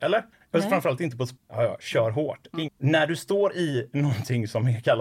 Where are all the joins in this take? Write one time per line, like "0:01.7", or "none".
0:01.4
0:02.7

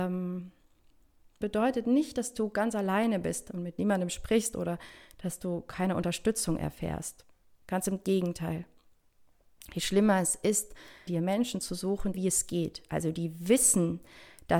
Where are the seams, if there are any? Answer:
0:01.4
0:11.1
0:12.1

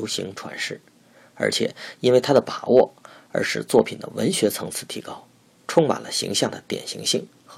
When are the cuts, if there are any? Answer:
none

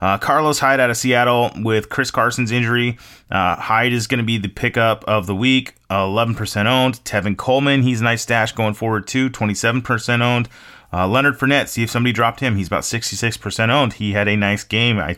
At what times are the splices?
none

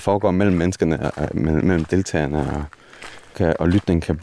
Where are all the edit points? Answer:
0:03.3

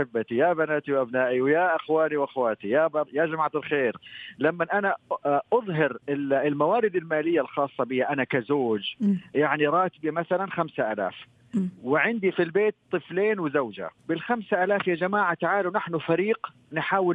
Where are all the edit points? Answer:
0:06.0
0:14.0

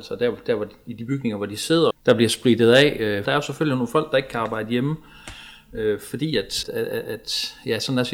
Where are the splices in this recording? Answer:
0:01.9
0:03.2
0:06.6

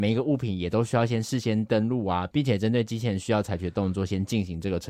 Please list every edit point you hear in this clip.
none

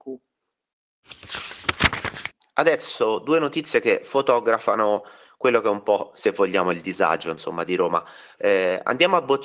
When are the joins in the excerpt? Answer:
0:08.4

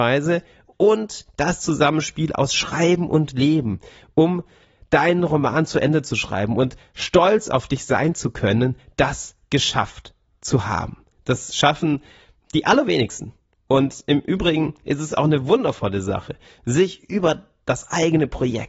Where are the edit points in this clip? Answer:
0:11.1

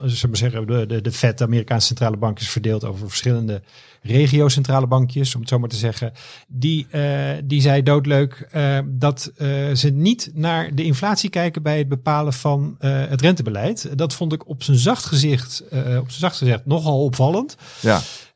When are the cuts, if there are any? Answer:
0:06.4

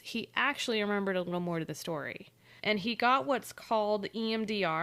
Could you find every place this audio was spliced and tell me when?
0:02.6

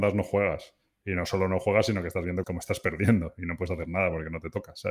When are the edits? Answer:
0:02.4

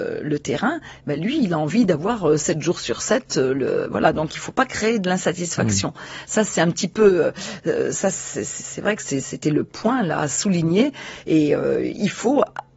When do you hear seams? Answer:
none

